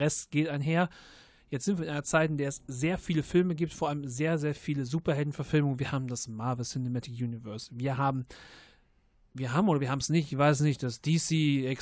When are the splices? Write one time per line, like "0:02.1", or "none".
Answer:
none